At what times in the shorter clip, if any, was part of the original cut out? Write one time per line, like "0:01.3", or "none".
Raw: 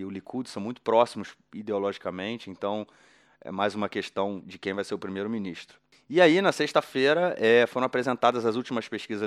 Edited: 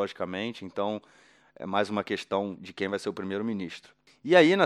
none